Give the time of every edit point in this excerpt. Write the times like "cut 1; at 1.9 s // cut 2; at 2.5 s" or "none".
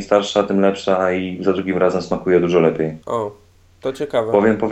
cut 1; at 3.0 s